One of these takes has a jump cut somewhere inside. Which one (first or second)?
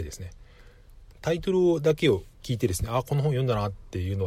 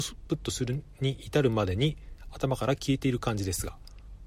first